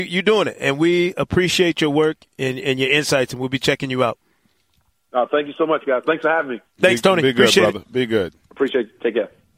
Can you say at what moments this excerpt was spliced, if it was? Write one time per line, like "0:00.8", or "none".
0:08.4